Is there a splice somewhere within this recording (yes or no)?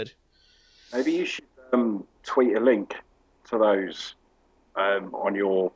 no